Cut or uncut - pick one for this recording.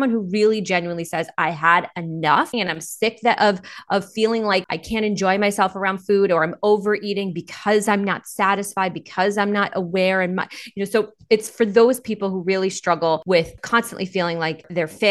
cut